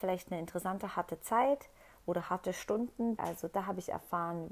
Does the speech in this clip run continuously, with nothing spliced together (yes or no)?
no